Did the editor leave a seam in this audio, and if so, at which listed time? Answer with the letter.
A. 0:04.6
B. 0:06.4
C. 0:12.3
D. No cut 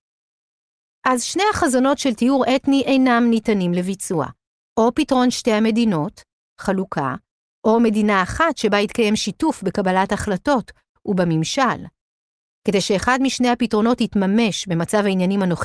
A